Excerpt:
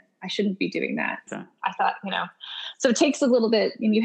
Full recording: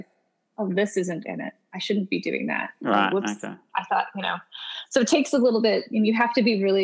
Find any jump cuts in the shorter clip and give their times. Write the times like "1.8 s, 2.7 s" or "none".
1.3 s

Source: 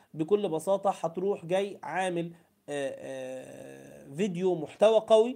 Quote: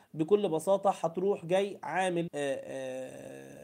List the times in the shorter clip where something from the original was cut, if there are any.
2.3 s

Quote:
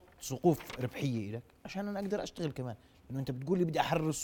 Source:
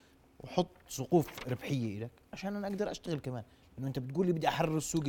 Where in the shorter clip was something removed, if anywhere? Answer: none

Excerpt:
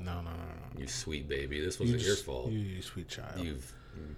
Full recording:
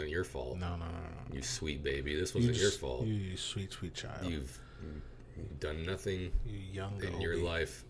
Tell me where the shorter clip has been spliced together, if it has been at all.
2.8 s

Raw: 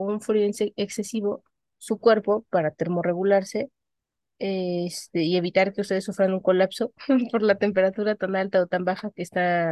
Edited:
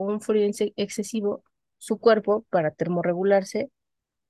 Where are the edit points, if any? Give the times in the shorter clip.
none

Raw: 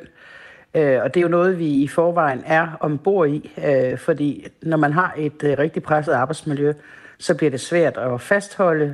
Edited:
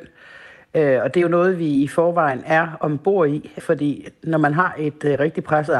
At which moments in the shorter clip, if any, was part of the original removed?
3.6 s

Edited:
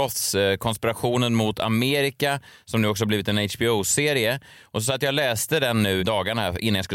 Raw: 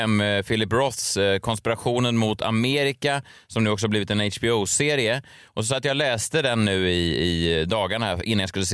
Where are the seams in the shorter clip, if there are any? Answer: 6.0 s

